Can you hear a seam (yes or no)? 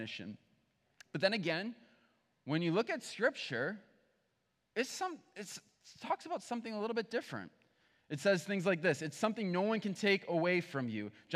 no